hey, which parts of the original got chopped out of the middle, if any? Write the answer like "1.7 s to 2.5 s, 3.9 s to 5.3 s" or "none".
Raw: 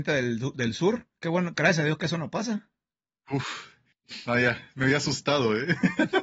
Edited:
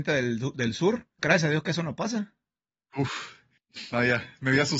1.2 s to 1.5 s